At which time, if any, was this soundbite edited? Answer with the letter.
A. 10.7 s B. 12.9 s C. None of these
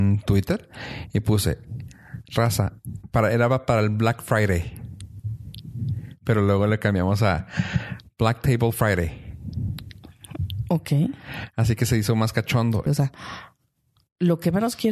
B